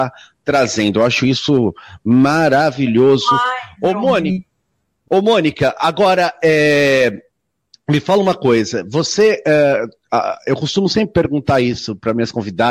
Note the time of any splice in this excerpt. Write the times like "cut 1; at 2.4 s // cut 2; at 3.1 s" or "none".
cut 1; at 5.1 s